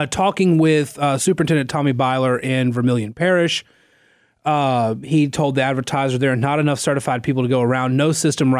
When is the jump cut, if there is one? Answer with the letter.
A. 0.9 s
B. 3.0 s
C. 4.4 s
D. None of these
D